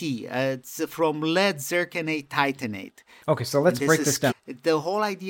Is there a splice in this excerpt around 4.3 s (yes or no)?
yes